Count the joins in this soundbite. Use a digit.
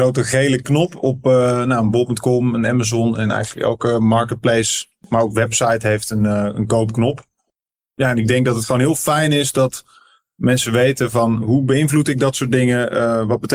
0